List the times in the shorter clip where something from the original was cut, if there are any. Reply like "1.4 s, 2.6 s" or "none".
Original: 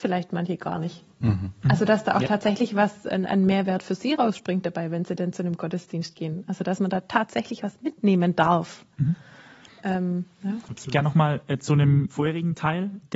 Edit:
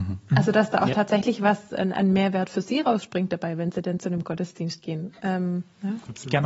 5.1 s